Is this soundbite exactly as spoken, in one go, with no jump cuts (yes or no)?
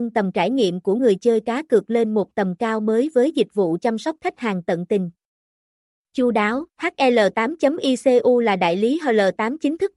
no